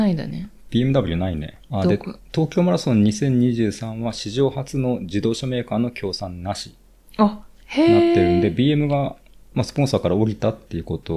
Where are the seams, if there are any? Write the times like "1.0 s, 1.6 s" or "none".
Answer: 1.7 s